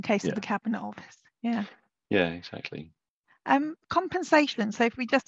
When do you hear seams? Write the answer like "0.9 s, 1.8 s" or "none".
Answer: none